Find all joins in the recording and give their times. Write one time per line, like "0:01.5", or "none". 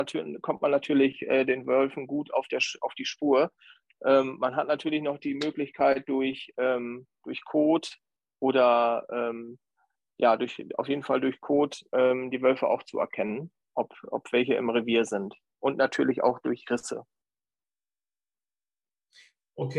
none